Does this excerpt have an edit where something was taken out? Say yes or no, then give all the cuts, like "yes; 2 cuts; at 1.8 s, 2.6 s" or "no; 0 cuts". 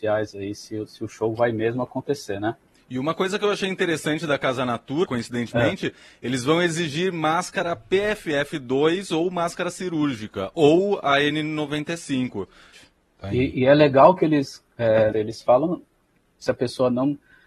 yes; 3 cuts; at 5.0 s, 12.7 s, 15.1 s